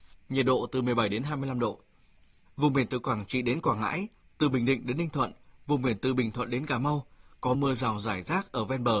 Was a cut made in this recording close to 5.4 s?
no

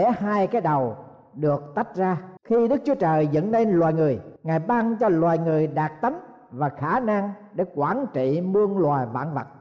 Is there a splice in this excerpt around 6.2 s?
no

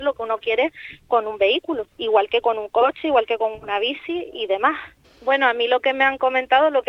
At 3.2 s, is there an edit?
no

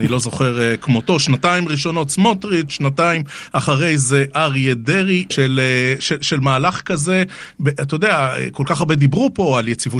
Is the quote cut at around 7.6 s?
no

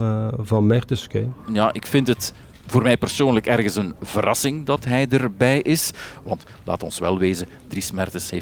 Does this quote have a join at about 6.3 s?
yes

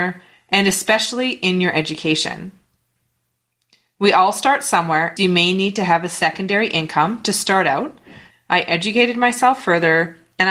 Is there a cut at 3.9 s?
no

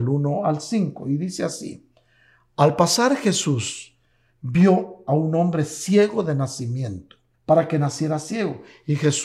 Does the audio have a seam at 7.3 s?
yes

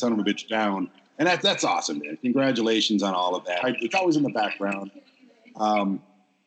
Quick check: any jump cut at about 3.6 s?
yes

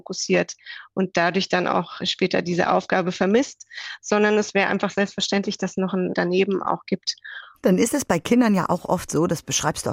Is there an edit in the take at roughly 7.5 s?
yes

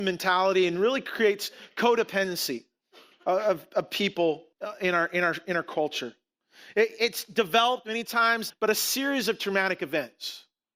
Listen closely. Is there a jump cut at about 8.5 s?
yes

